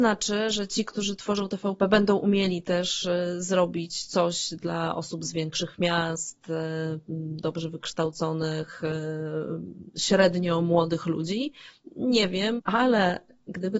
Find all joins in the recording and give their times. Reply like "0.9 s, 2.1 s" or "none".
12.6 s